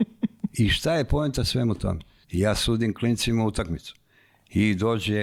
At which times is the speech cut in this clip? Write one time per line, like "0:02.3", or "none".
0:02.2